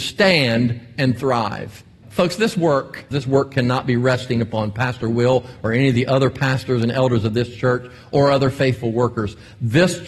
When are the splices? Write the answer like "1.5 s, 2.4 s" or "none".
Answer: 2.0 s, 3.1 s